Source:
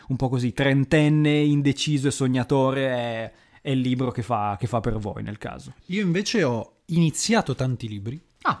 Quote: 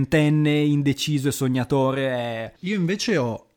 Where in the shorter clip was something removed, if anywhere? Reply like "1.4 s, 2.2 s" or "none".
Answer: 2.6 s